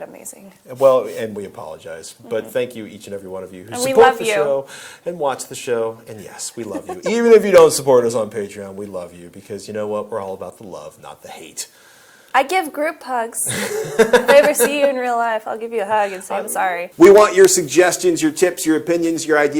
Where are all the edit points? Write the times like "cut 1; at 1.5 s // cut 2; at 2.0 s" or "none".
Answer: none